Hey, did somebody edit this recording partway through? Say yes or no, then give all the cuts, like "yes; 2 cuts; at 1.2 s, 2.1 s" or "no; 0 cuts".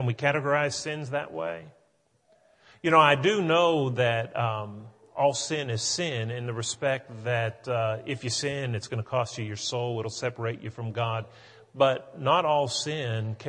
no; 0 cuts